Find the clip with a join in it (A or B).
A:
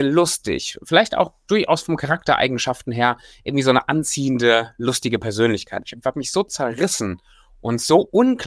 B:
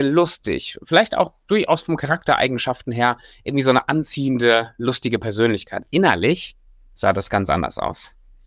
A